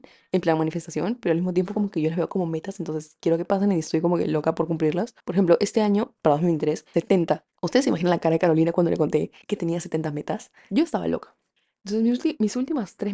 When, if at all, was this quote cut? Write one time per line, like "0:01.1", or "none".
0:06.9
0:10.7